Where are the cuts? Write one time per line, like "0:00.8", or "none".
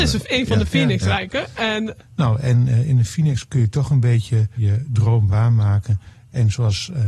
0:02.0
0:04.6